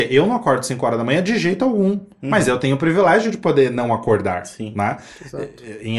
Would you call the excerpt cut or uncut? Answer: uncut